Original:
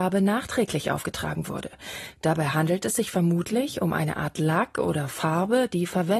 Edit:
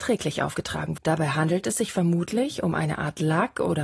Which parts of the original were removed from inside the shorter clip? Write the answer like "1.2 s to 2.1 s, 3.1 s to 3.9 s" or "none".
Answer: 1.5 s to 2.2 s